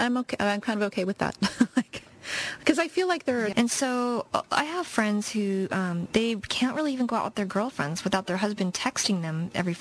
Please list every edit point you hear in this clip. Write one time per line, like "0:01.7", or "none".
0:03.5
0:06.1